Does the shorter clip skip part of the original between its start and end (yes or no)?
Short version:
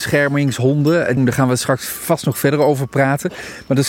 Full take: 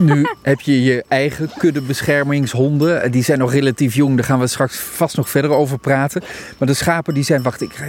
yes